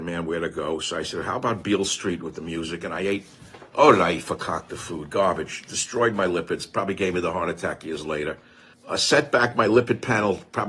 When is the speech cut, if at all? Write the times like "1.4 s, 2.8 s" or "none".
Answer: 8.7 s